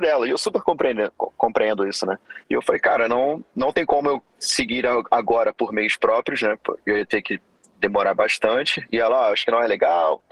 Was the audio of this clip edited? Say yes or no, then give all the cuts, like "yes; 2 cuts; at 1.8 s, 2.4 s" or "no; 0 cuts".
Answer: yes; 1 cut; at 2.4 s